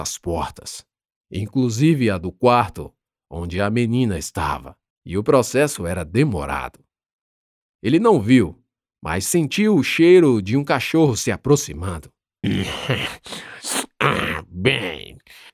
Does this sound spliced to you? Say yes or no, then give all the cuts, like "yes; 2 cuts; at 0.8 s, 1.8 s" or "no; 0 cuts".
yes; 2 cuts; at 4.9 s, 12.4 s